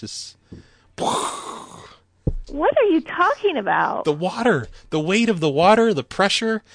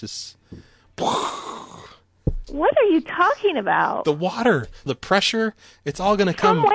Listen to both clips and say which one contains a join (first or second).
second